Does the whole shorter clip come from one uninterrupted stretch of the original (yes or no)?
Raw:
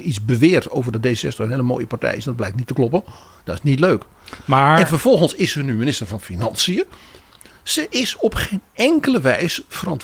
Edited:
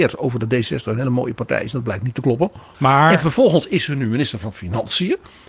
no